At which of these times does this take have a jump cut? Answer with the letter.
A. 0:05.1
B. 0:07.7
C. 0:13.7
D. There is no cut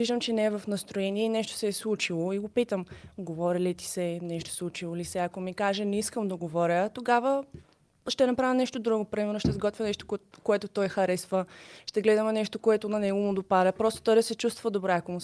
D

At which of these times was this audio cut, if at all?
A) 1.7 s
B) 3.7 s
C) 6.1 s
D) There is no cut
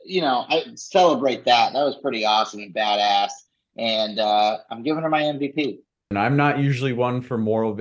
C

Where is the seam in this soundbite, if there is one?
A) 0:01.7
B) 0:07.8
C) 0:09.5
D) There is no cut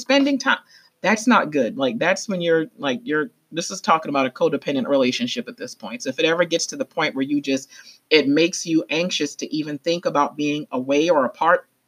D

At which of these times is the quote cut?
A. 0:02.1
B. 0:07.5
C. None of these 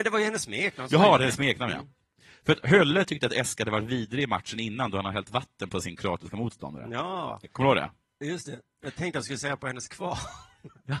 C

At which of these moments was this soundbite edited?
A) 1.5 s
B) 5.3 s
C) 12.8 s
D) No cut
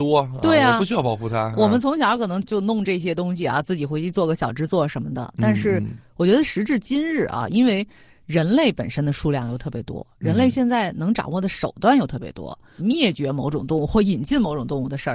C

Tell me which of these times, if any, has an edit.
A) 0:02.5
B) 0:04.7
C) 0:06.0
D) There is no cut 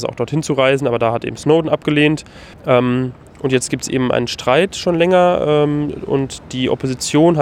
A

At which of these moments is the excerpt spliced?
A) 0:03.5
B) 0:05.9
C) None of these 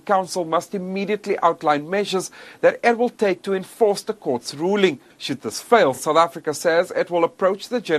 C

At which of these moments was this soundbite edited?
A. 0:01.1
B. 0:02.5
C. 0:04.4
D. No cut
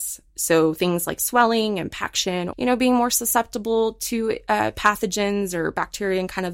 B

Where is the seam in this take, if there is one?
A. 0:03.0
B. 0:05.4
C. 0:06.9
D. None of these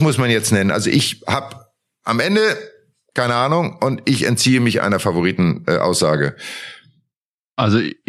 D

